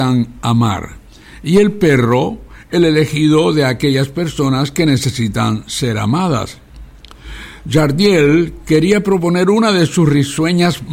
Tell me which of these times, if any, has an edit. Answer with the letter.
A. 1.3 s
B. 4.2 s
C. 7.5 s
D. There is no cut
D